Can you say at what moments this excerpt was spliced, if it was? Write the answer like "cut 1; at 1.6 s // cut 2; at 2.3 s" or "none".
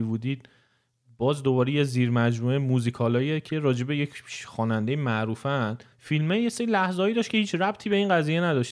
cut 1; at 5.9 s